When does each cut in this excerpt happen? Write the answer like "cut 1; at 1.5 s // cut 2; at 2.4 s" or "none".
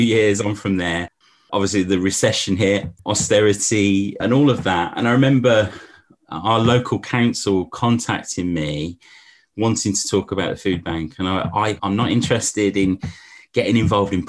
cut 1; at 3.0 s // cut 2; at 11.8 s